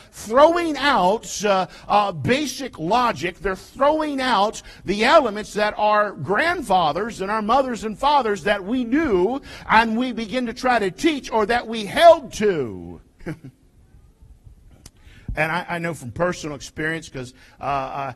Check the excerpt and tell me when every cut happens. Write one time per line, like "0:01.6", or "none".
0:13.2